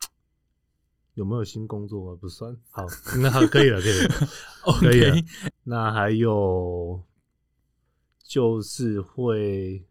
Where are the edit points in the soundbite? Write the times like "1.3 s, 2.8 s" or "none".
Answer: 5.5 s

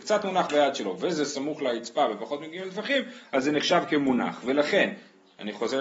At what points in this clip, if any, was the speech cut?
none

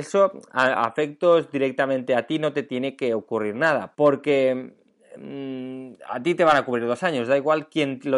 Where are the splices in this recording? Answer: 3.9 s

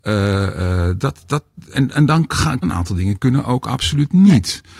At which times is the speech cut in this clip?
2.6 s

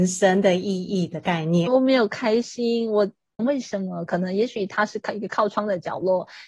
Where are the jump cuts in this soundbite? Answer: 1.7 s, 3.4 s

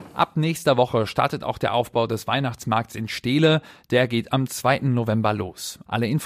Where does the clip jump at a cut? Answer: none

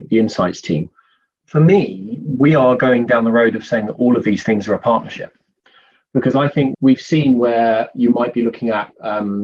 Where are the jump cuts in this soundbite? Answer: 1.4 s, 6.7 s

